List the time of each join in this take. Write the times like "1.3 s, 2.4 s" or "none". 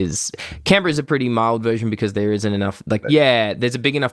3.0 s